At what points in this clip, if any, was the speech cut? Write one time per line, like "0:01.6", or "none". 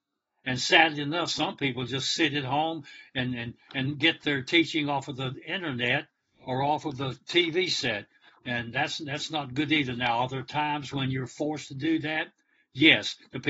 none